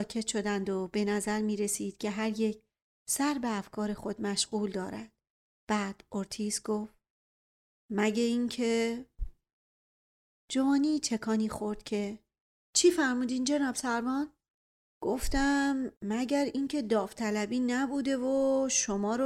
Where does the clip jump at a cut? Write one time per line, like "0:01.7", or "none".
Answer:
none